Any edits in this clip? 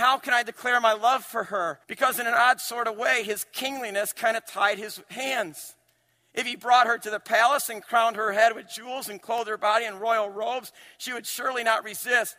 yes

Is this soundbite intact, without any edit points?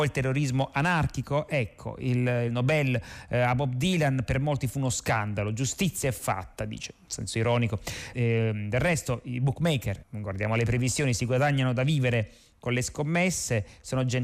no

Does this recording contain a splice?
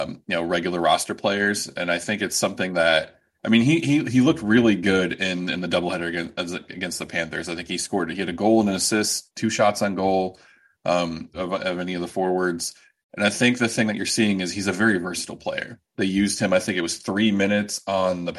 yes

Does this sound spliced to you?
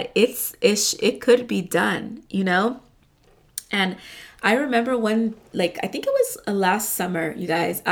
no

